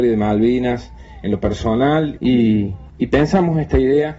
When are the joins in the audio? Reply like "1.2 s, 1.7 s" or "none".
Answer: 2.2 s